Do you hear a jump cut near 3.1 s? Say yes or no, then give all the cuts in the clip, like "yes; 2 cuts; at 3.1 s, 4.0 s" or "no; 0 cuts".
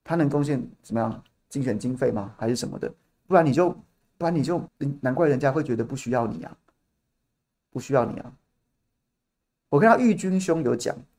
no; 2 cuts; at 4.7 s, 9.7 s